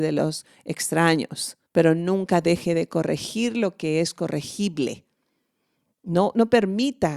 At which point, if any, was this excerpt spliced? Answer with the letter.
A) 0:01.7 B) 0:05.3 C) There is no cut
A